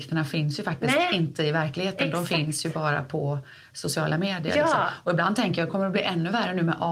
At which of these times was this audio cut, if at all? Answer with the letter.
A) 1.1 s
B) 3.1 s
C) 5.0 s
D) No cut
D